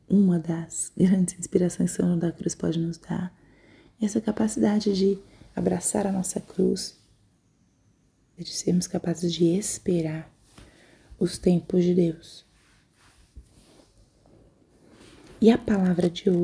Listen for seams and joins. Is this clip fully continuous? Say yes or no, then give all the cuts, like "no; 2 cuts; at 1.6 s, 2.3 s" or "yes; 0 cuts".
no; 1 cut; at 8.4 s